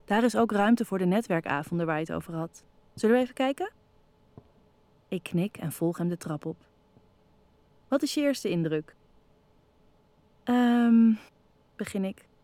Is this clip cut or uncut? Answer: uncut